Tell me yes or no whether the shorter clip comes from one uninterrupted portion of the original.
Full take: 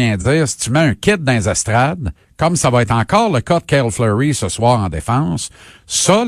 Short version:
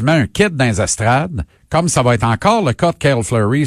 yes